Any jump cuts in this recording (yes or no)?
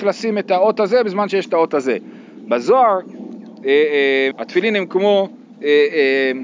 yes